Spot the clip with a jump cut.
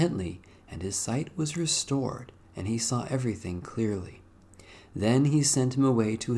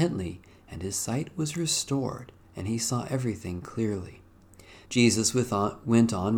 second; 1 cut; at 4.8 s

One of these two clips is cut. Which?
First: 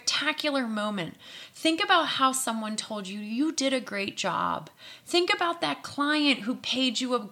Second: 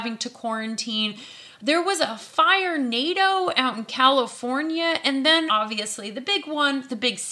second; 1 cut; at 5.5 s

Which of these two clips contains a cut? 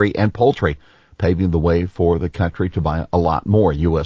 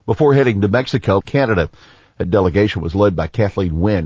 second; 1 cut; at 1.2 s

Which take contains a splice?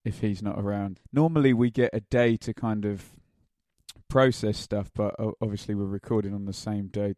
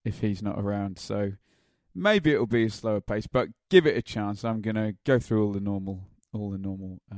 first; 1 cut; at 1.0 s

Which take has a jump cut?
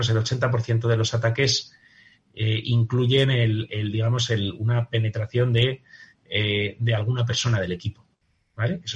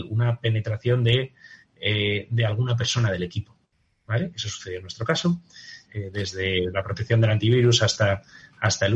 second; 1 cut; at 5.8 s

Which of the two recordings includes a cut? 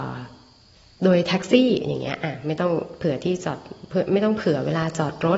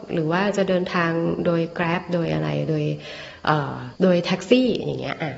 second; 1 cut; at 4.0 s

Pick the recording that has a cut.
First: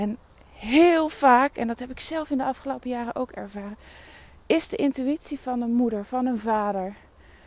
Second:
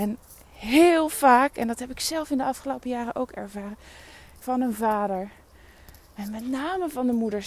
second; 1 cut; at 4.4 s

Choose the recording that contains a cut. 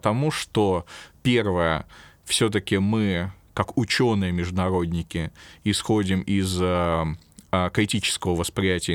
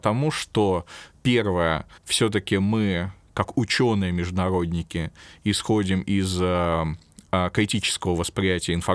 second; 1 cut; at 2.0 s

